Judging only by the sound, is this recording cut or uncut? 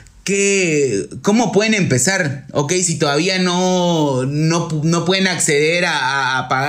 uncut